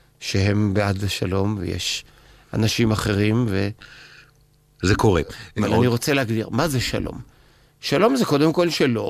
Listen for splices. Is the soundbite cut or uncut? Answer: cut